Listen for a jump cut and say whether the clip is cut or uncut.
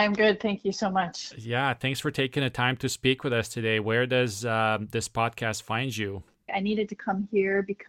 cut